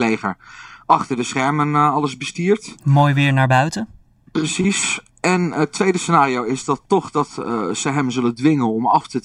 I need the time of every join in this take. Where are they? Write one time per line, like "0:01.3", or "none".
none